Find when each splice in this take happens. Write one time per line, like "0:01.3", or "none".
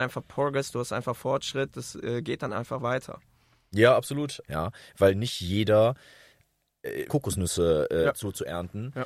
0:04.4
0:07.1